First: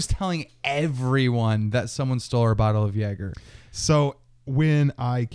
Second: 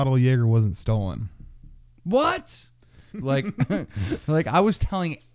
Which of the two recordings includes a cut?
second; 1 cut; at 3.1 s

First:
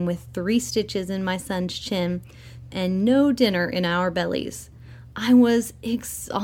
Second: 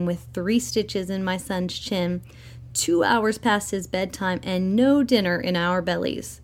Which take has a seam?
first; 1 cut; at 2.7 s

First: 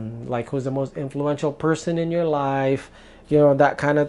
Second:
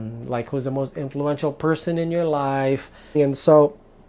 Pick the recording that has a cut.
second; 1 cut; at 3.1 s

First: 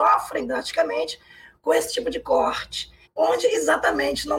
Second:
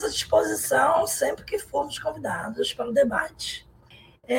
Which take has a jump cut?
first; 1 cut; at 3.0 s

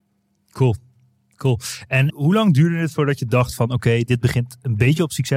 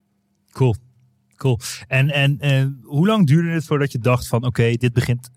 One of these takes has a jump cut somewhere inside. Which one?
first; 1 cut; at 2.1 s

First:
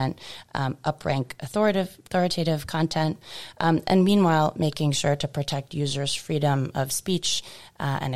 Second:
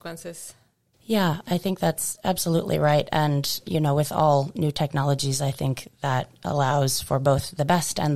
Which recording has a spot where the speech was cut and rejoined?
second; 1 cut; at 0.9 s

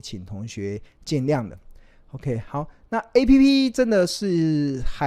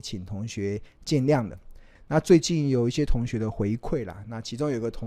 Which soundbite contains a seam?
second; 1 cut; at 2.0 s

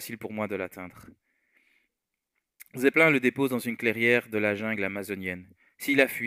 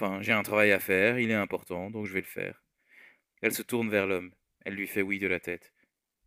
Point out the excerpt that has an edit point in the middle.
second; 1 cut; at 3.2 s

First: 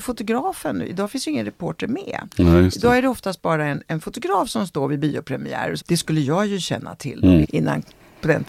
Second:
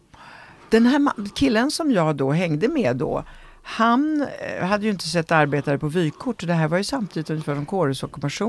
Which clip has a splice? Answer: first; 2 cuts; at 5.8 s, 7.4 s

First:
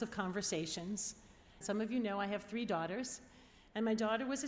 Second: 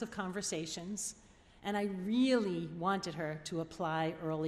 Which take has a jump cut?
first; 1 cut; at 1.6 s

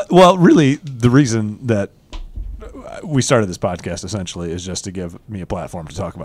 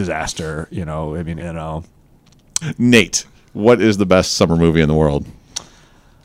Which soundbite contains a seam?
second; 2 cuts; at 1.4 s, 2.6 s

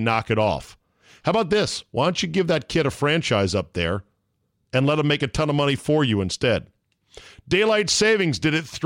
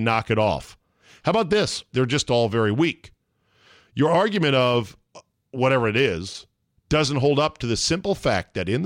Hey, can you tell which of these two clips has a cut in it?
second; 1 cut; at 1.9 s

